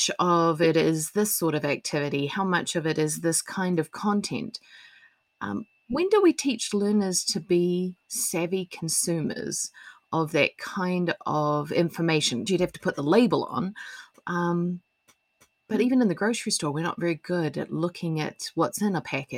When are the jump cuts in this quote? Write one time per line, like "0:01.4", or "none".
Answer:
0:12.5